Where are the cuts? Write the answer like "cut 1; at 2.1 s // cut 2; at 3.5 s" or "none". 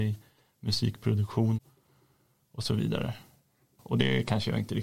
none